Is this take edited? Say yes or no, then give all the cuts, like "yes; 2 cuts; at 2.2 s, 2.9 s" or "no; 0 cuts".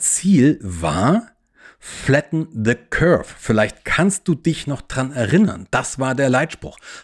no; 0 cuts